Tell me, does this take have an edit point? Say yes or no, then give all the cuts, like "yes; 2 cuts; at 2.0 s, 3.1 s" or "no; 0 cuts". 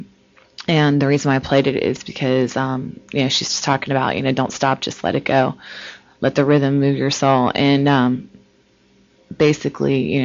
no; 0 cuts